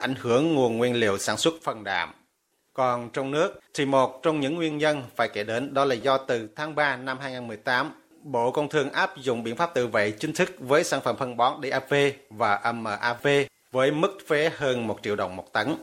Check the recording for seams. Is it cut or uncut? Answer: cut